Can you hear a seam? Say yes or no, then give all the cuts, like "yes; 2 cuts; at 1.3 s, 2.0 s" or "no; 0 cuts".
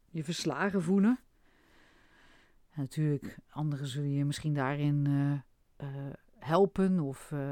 no; 0 cuts